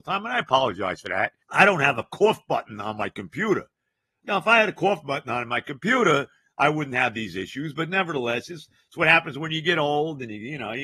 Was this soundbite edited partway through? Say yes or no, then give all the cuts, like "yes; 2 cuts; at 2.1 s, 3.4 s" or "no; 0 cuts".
yes; 1 cut; at 1.4 s